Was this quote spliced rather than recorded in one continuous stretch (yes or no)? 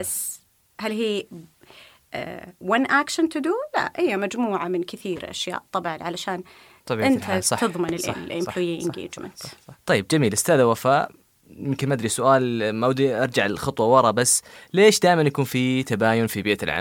no